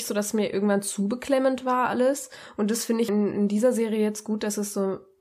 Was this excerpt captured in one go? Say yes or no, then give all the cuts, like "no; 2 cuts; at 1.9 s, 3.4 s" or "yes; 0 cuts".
no; 1 cut; at 3.1 s